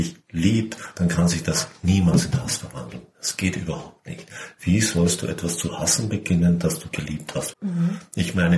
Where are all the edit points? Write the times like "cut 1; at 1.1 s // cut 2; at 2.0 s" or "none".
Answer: cut 1; at 7.5 s